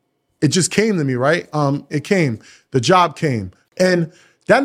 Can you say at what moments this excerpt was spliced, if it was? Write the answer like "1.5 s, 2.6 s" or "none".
1.9 s, 3.6 s